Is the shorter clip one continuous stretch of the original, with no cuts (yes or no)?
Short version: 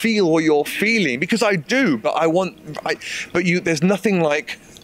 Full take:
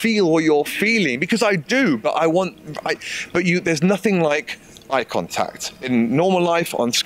yes